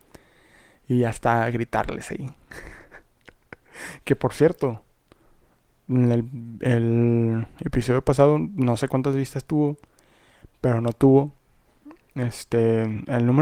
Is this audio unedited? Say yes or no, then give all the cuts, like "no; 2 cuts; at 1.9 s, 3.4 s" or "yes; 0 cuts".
yes; 0 cuts